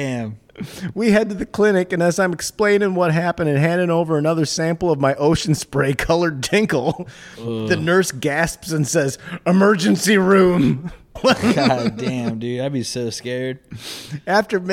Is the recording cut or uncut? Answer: cut